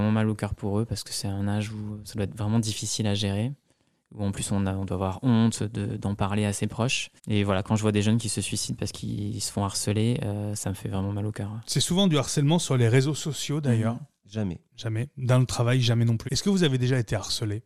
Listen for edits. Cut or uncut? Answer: cut